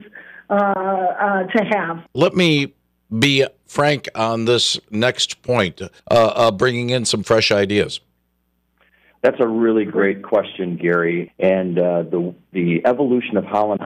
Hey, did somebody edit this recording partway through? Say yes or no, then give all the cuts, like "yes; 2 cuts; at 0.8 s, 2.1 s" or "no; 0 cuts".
yes; 3 cuts; at 2.1 s, 6.0 s, 11.3 s